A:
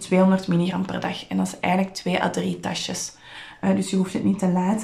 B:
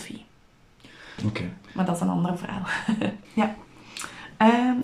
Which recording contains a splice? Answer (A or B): B